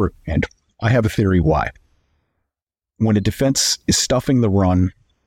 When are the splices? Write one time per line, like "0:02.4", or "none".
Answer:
0:02.8